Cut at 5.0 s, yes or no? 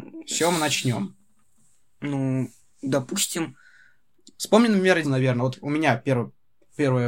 yes